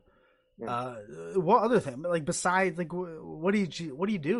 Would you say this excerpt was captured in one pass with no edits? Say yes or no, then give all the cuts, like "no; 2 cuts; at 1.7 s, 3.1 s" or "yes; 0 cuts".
yes; 0 cuts